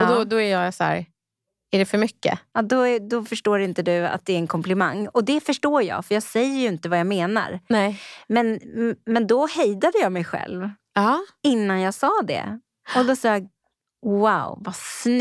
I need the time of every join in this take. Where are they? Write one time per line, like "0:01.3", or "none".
none